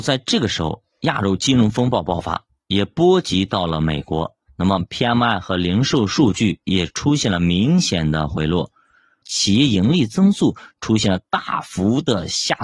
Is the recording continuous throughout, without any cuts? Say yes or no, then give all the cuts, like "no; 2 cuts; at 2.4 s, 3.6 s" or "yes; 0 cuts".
no; 1 cut; at 9.2 s